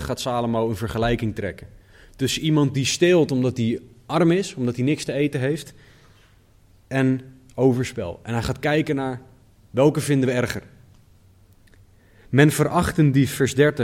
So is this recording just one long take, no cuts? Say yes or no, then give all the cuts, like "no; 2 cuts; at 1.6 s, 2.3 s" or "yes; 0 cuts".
yes; 0 cuts